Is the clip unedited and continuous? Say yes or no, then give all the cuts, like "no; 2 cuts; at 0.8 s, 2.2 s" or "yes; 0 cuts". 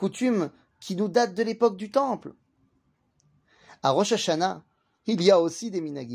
yes; 0 cuts